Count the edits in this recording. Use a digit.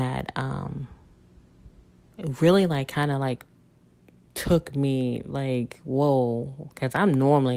0